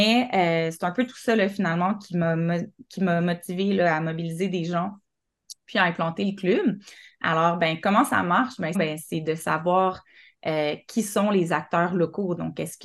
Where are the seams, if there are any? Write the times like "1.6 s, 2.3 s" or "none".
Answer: 8.7 s